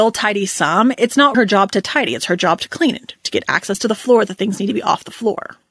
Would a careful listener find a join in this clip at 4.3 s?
no; 1 cut; at 1.3 s

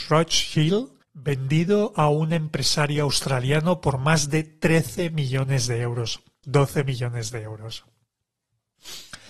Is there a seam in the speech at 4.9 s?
no; 2 cuts; at 1.0 s, 6.4 s

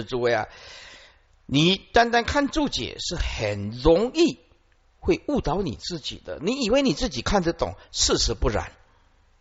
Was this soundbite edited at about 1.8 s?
no; 0 cuts

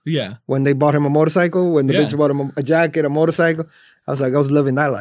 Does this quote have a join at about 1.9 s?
no; 0 cuts

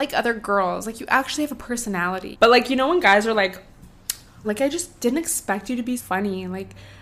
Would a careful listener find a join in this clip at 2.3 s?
yes; 3 cuts; at 2.3 s, 4.4 s, 6.0 s

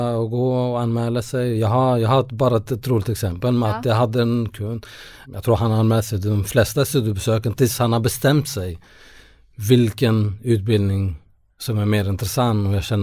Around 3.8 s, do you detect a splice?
no; 1 cut; at 5.2 s

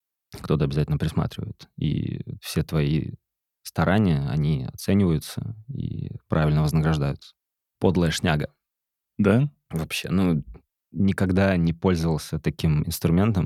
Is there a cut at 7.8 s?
yes; 1 cut; at 7.8 s

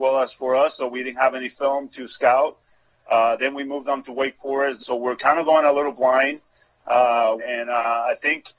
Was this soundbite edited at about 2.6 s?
no; 2 cuts; at 4.8 s, 7.4 s

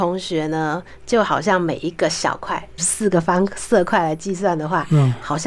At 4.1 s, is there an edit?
no; 1 cut; at 2.8 s

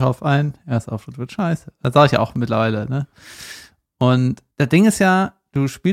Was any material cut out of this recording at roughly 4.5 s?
yes; 1 cut; at 4.5 s

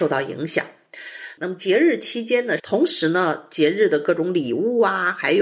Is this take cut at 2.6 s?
yes; 2 cuts; at 1.4 s, 2.6 s

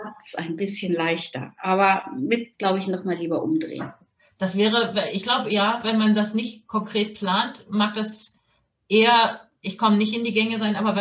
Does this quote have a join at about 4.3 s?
no; 1 cut; at 2.5 s

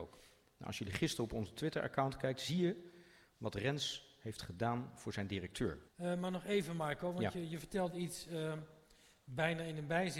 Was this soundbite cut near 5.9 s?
yes; 1 cut; at 5.9 s

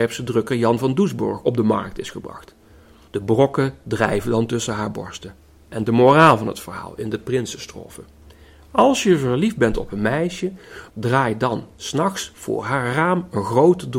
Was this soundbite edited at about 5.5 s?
no; 2 cuts; at 3.1 s, 10.9 s

